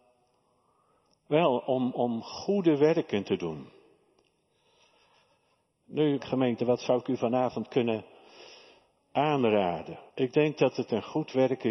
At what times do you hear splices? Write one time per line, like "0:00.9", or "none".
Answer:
0:06.2
0:10.1